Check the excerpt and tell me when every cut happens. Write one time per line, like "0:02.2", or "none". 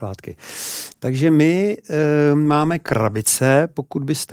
none

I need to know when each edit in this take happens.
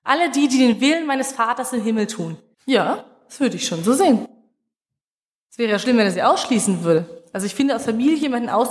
0:02.5

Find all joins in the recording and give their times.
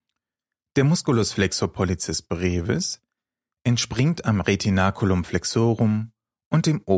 none

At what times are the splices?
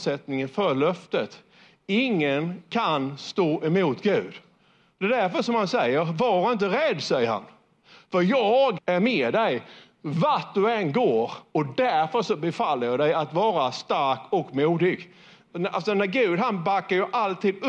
0:08.8

